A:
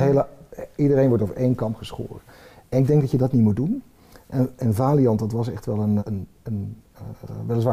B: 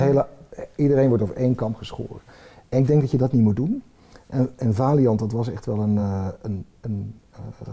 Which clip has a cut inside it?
A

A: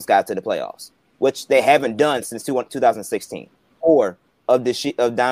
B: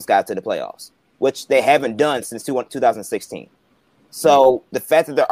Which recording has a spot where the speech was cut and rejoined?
A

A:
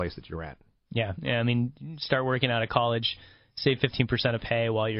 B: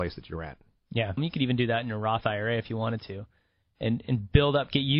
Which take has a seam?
B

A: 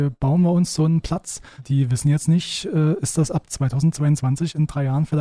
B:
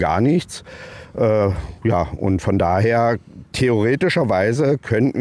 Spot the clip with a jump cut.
A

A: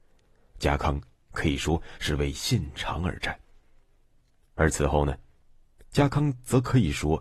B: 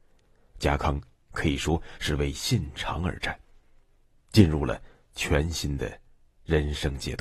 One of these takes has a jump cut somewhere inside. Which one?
B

